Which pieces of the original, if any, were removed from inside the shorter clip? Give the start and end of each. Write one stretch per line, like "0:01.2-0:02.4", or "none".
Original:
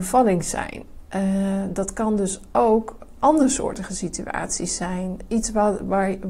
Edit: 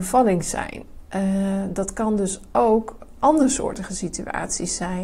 none

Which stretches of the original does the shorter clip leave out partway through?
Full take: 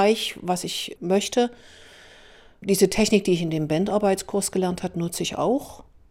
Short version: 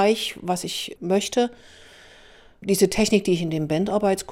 none

